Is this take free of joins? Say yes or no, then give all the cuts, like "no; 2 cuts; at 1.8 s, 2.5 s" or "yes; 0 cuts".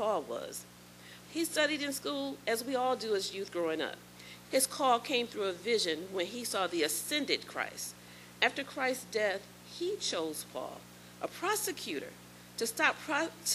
no; 2 cuts; at 1.2 s, 4.4 s